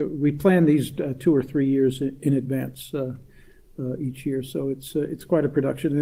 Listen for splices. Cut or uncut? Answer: uncut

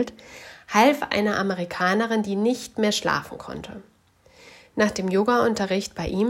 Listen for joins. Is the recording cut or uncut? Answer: uncut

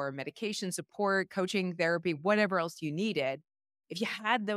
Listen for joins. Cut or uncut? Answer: uncut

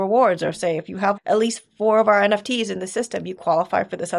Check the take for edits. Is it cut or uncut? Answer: cut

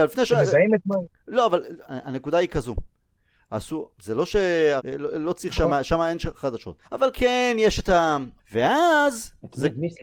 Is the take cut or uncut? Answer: cut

